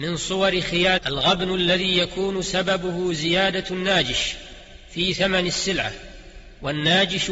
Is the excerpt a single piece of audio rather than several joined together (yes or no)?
no